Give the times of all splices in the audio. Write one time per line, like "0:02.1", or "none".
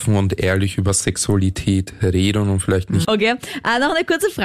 0:03.0